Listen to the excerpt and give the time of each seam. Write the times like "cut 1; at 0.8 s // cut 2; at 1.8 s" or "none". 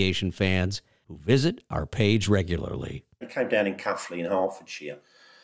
cut 1; at 3.2 s